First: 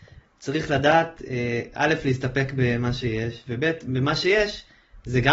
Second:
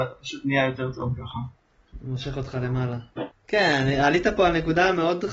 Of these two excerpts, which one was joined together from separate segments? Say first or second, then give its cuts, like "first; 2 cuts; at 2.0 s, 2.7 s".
second; 1 cut; at 3.3 s